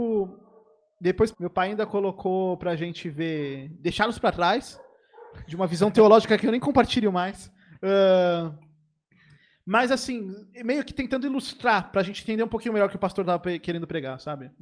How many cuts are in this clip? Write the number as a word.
one